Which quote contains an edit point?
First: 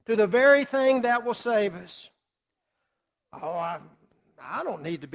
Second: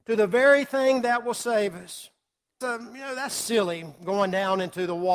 second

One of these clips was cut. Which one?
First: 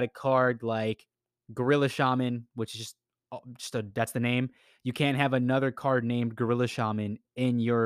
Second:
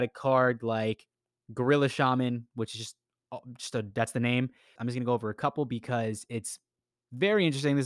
second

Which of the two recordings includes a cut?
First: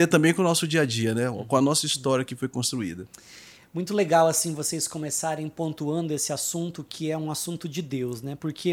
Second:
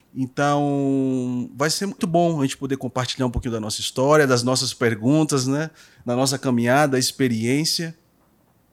second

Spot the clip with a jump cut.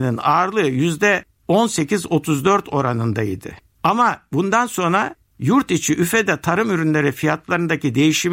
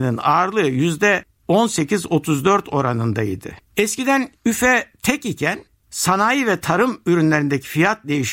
second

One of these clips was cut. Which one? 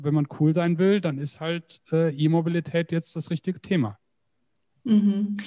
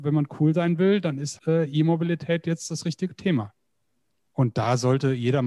second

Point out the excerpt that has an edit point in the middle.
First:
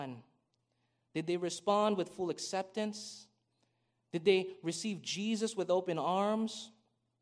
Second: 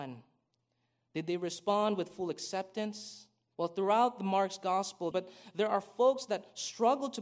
second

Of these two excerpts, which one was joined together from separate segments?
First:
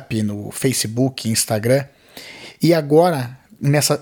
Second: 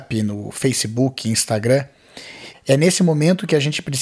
second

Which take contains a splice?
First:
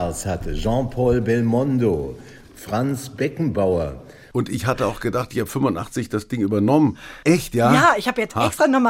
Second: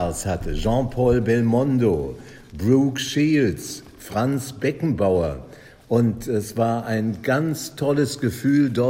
first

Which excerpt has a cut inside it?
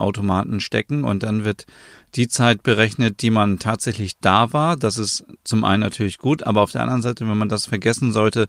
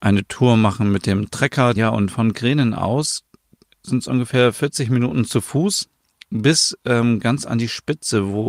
second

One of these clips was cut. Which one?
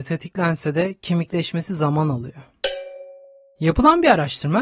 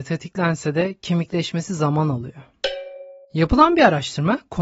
second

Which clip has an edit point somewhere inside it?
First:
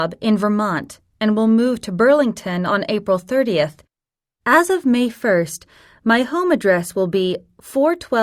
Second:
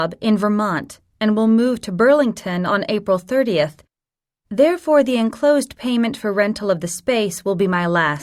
first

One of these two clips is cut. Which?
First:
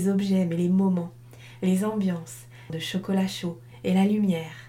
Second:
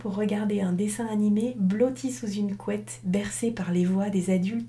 first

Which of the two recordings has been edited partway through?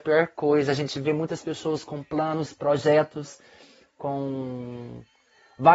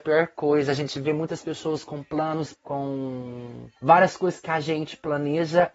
second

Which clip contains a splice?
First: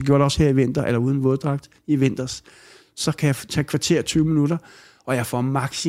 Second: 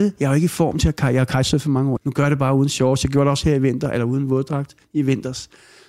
second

